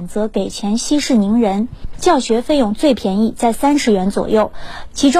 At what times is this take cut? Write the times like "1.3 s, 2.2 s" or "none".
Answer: 1.9 s